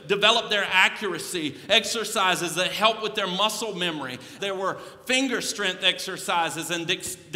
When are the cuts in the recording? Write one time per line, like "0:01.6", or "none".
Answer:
0:04.4

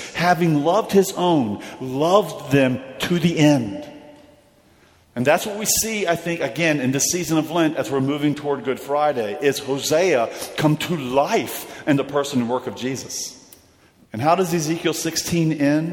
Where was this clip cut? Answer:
0:14.0

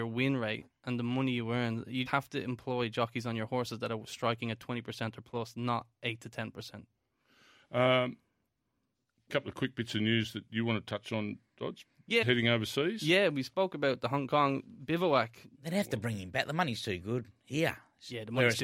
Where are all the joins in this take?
0:02.1
0:12.2
0:15.5

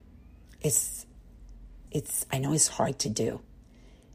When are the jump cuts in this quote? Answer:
0:01.9

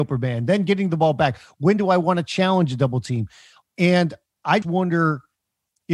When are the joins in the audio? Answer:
0:03.6
0:04.6

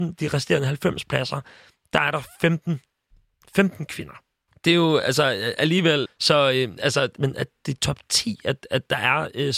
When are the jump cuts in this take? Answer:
0:04.5
0:06.1
0:07.2

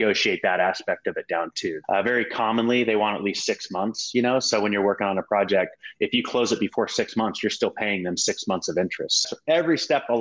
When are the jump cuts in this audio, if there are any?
0:01.8
0:09.2

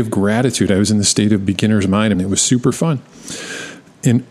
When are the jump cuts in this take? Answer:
0:02.1

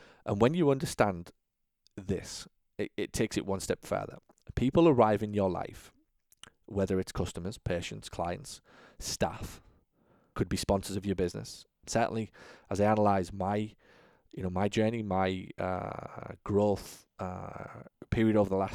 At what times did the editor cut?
0:10.3
0:11.8

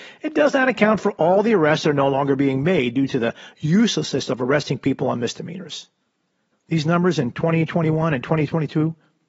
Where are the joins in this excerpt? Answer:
0:06.5

